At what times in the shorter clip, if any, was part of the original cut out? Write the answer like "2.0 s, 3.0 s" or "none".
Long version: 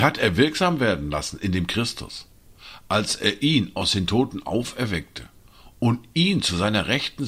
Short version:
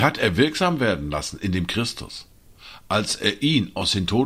none